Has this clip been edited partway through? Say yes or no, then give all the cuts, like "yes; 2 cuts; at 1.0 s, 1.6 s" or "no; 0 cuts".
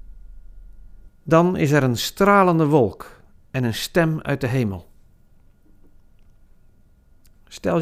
yes; 1 cut; at 1.1 s